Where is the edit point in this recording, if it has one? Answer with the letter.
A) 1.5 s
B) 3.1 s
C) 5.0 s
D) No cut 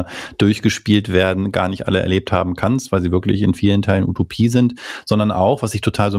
D